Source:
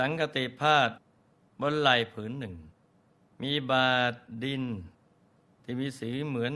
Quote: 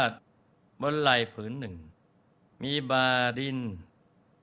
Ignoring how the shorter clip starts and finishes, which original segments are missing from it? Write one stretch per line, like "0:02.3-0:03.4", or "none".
0:04.1-0:04.4